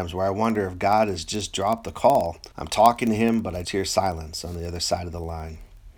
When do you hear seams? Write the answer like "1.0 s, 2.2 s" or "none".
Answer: 2.5 s, 3.6 s